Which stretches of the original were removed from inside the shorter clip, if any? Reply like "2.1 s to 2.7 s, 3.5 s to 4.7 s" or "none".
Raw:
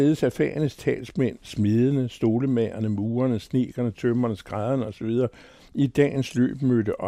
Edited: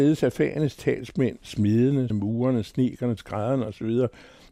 2.1 s to 2.9 s, 3.9 s to 4.4 s